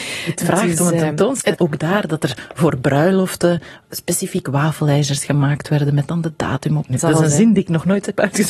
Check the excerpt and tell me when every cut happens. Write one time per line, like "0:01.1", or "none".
0:01.5
0:06.9